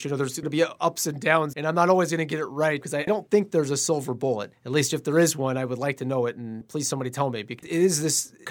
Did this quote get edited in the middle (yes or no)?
yes